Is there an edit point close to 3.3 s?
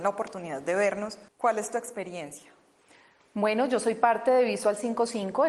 no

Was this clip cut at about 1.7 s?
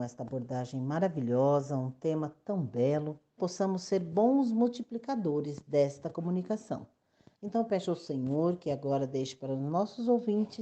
no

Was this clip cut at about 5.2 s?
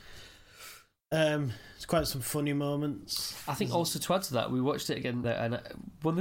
yes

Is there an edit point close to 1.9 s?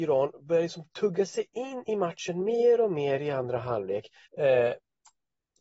no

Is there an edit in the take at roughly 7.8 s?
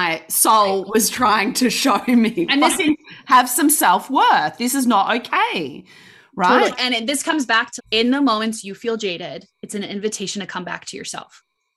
yes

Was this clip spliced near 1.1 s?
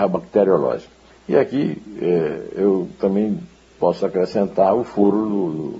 yes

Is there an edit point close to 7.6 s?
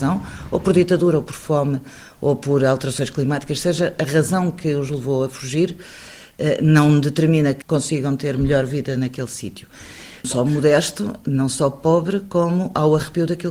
yes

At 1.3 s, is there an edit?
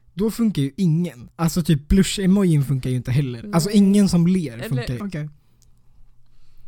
yes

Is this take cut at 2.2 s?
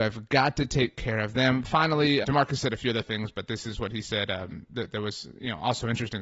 yes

